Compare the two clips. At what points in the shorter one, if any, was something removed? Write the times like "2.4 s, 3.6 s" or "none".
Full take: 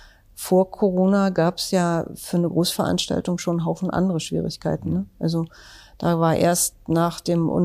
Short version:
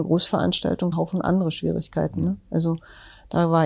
0.9 s